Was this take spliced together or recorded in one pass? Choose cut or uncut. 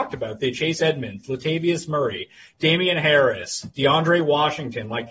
uncut